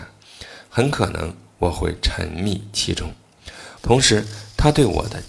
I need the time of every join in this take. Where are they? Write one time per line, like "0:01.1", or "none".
0:03.8